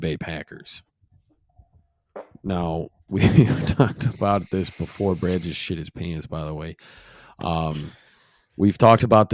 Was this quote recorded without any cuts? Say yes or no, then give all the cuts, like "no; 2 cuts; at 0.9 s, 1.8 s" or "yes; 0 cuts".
yes; 0 cuts